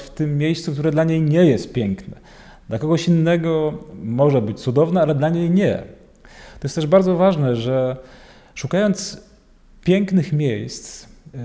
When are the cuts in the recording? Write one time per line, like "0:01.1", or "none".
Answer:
none